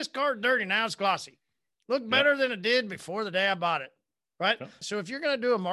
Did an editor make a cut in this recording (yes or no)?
yes